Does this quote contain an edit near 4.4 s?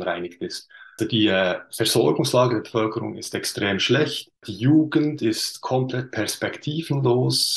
no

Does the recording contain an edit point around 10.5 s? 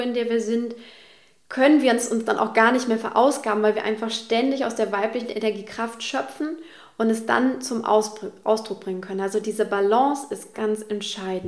yes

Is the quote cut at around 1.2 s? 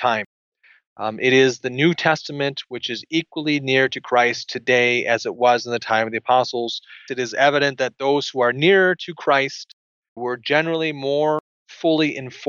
no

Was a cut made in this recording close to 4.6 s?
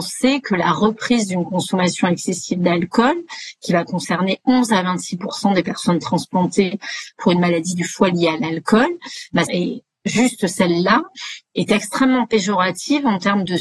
no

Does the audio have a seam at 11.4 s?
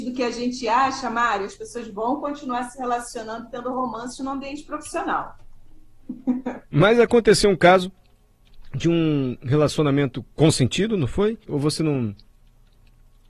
yes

